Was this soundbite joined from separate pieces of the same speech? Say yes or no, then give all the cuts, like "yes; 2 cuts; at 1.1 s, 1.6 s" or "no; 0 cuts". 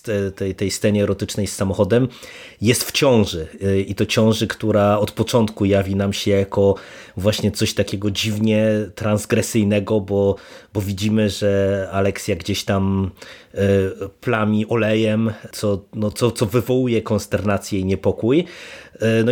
no; 0 cuts